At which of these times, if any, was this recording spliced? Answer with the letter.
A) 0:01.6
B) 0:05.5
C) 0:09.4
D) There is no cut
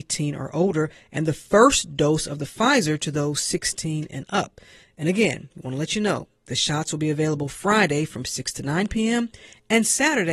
D